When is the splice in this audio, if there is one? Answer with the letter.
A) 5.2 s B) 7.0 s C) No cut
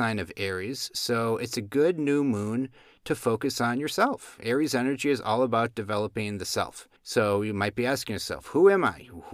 B